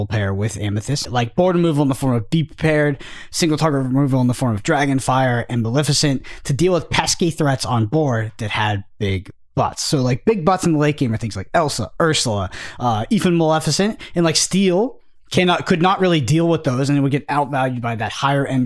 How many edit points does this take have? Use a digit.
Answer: 1